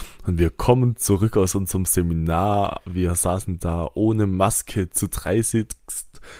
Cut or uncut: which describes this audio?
uncut